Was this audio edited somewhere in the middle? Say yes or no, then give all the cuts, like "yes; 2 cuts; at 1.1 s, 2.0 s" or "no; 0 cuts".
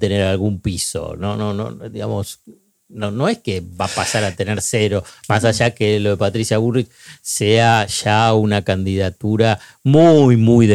no; 0 cuts